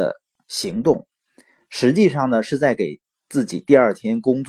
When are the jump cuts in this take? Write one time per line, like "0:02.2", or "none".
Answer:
none